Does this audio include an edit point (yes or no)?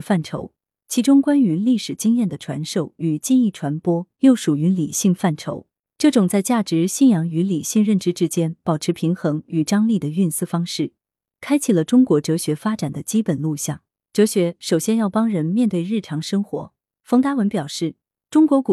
no